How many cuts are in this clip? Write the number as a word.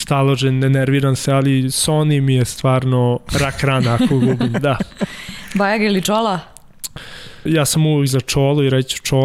one